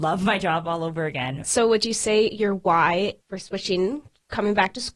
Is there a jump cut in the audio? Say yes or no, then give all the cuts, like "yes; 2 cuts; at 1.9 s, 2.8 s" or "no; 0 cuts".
yes; 2 cuts; at 1.4 s, 3.2 s